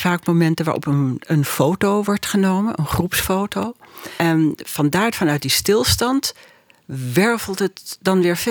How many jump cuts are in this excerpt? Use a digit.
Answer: 0